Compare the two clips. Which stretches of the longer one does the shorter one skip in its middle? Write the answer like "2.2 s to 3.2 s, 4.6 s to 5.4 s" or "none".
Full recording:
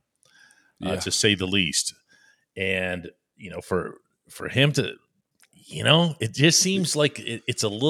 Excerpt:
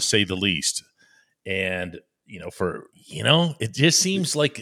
4.0 s to 5.5 s